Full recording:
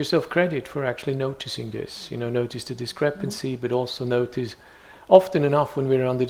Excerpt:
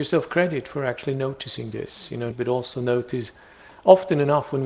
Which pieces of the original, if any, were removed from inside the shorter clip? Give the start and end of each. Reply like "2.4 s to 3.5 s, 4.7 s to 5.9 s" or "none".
2.3 s to 3.5 s